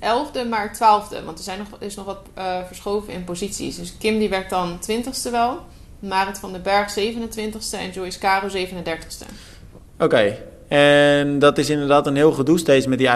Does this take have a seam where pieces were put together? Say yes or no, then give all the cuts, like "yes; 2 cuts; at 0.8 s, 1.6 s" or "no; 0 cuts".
no; 0 cuts